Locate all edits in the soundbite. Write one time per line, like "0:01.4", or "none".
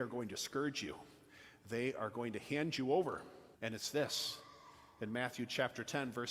0:03.5